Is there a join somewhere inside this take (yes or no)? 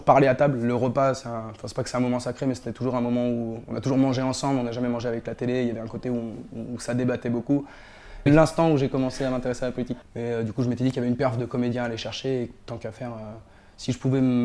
yes